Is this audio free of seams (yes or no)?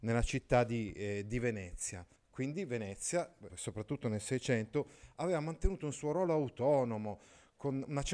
no